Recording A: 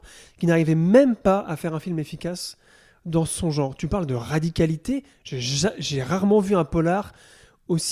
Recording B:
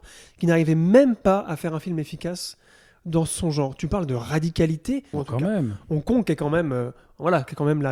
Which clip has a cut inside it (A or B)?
B